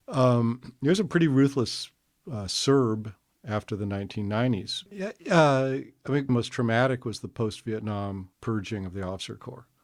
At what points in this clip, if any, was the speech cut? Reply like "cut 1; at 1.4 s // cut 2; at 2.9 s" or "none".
cut 1; at 4.9 s // cut 2; at 6.3 s // cut 3; at 8.3 s